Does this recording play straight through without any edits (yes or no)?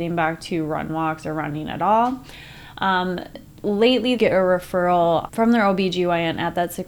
no